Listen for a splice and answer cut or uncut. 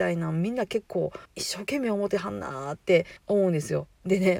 cut